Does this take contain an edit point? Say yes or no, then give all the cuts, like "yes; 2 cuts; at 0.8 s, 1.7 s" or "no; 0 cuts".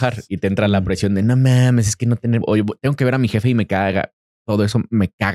yes; 1 cut; at 2.4 s